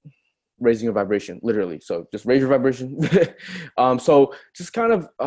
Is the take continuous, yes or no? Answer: yes